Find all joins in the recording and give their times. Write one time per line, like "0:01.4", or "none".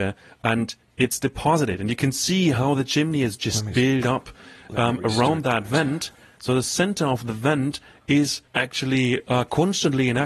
0:08.5